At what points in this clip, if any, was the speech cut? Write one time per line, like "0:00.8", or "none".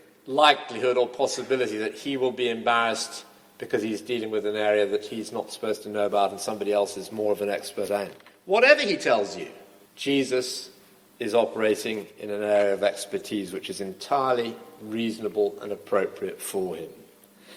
0:09.9